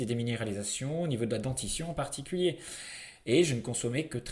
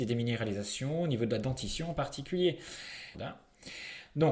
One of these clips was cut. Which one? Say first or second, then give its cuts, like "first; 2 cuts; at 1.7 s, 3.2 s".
second; 1 cut; at 3.1 s